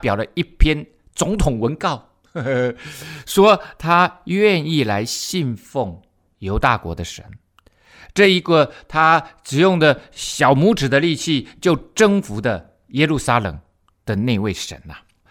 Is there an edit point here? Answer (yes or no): no